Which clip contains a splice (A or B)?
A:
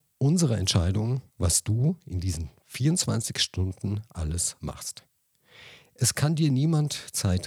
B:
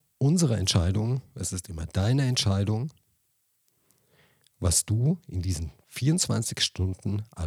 A